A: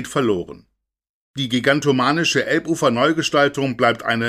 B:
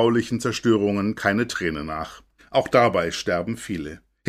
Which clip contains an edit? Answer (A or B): B